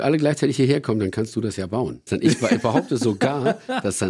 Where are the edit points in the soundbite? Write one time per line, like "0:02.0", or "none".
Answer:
0:02.1